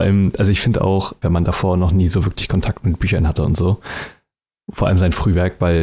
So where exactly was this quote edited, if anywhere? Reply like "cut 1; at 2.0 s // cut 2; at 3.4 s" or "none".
cut 1; at 1.2 s